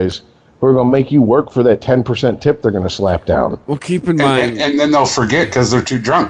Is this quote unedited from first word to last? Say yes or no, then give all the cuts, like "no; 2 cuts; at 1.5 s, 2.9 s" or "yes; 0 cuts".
yes; 0 cuts